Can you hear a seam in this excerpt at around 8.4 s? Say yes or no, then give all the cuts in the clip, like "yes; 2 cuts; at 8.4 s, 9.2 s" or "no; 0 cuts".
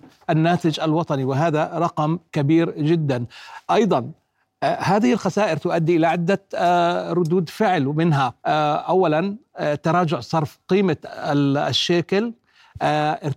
yes; 1 cut; at 8.4 s